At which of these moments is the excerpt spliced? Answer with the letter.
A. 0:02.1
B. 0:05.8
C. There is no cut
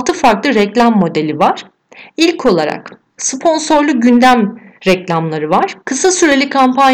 B